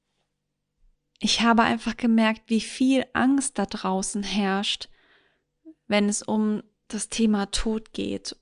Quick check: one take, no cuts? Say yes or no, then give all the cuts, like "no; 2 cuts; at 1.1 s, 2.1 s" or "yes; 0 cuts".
yes; 0 cuts